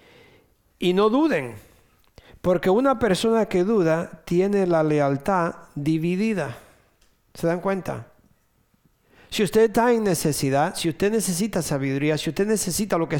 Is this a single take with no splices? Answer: yes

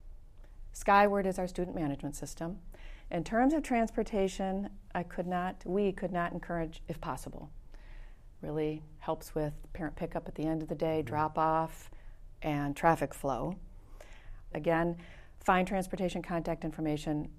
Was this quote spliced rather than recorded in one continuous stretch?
yes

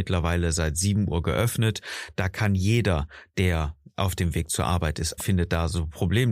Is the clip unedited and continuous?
no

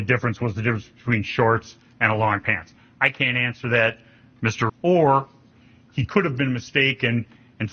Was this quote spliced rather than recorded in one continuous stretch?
yes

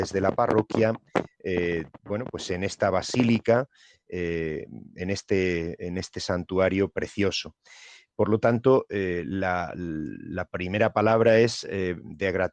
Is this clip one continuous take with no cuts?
yes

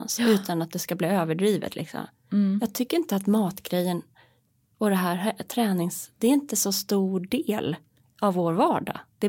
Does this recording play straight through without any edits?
yes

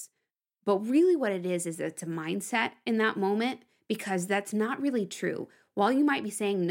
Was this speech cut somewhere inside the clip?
no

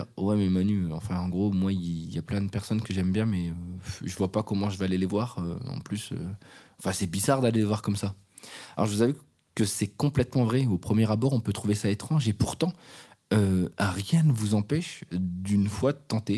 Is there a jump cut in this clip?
no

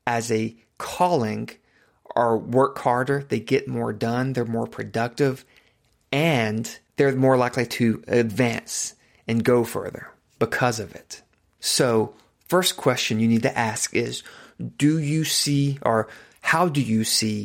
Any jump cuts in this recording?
no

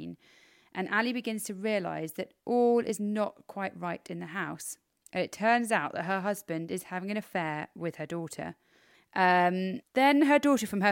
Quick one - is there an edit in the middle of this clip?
yes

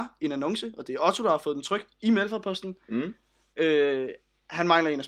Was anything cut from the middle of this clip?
no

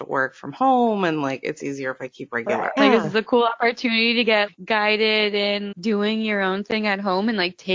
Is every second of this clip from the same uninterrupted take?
no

